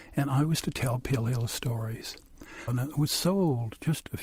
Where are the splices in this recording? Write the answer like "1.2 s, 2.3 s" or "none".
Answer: 2.7 s